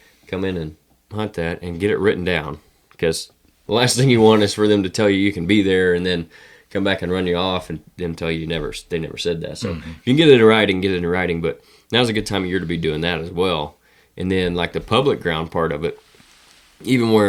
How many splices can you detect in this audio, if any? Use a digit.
0